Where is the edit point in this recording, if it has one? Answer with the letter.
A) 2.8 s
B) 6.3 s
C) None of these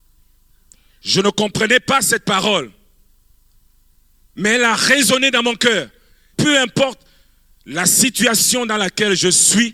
B